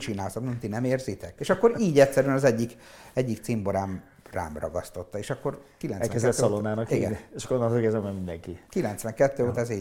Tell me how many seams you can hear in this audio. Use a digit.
1